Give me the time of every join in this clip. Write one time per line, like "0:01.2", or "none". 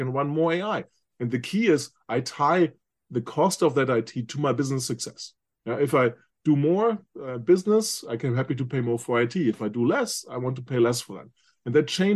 none